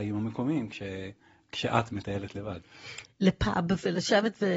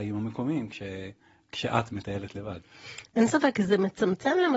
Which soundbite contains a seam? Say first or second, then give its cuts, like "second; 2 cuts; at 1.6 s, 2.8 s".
first; 1 cut; at 3.0 s